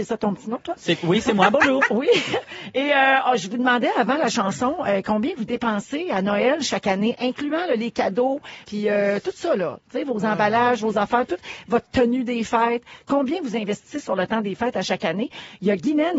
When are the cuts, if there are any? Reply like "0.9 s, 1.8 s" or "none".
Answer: 8.6 s